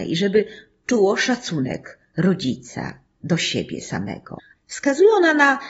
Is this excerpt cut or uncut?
cut